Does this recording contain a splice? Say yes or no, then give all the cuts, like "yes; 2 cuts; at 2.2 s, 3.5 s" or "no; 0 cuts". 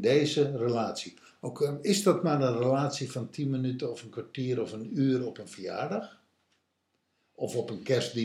no; 0 cuts